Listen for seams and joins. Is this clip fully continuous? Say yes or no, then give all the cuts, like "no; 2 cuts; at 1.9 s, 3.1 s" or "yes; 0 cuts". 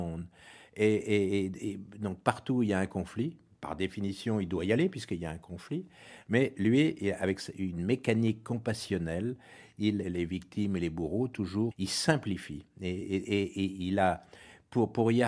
no; 2 cuts; at 10.0 s, 11.7 s